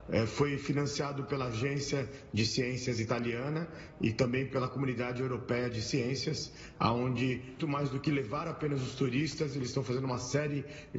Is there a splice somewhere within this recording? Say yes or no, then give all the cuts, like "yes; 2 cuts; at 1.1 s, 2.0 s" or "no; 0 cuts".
yes; 1 cut; at 7.6 s